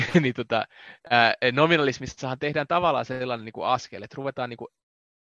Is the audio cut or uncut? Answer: uncut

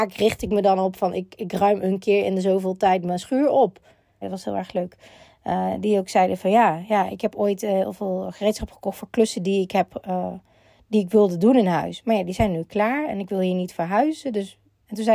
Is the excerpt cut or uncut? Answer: cut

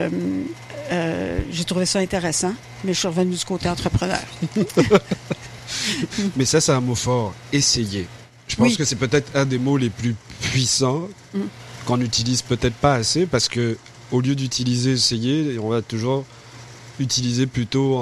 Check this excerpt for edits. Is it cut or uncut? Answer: uncut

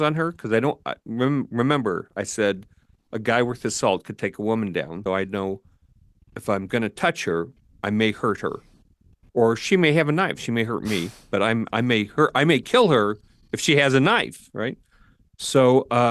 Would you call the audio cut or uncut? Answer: cut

